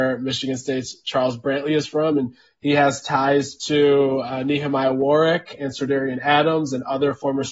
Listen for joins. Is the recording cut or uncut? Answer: uncut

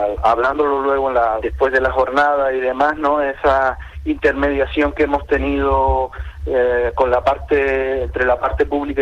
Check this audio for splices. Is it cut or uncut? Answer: cut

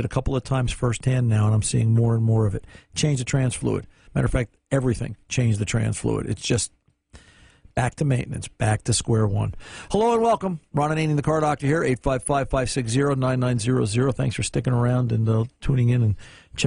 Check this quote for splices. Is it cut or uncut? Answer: uncut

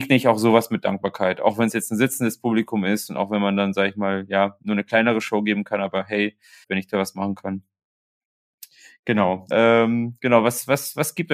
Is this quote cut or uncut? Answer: cut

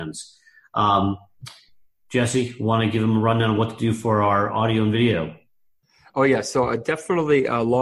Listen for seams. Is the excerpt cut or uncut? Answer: uncut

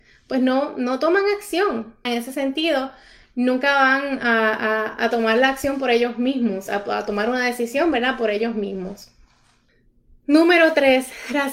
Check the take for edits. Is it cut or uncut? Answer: cut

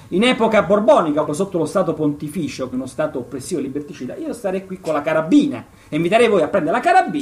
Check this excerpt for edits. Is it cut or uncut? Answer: cut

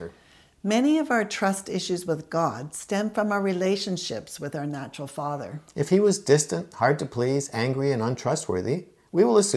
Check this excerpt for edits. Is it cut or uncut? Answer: uncut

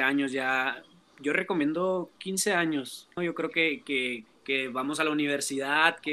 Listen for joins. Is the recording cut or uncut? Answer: cut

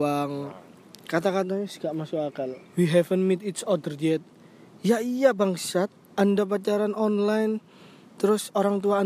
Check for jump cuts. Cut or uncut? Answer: cut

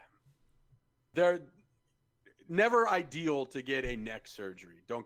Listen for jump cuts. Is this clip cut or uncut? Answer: uncut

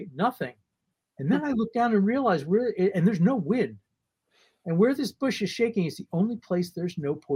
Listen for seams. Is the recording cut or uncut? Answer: uncut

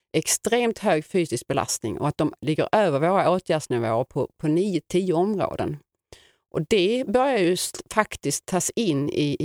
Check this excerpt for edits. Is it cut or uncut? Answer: uncut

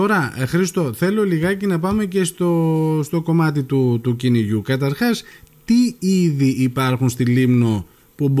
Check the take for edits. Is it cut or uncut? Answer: uncut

